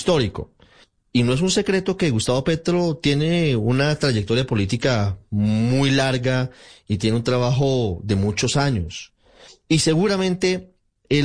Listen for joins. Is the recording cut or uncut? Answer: uncut